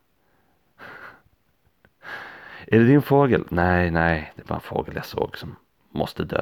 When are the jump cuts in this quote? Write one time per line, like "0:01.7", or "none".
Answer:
none